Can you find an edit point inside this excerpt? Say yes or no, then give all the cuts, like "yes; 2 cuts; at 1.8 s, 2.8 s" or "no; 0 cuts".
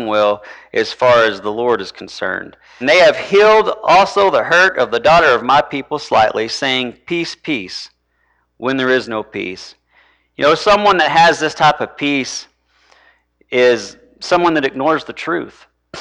yes; 1 cut; at 2.8 s